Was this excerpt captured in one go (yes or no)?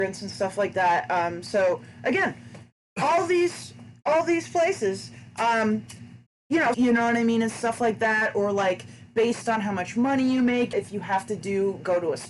no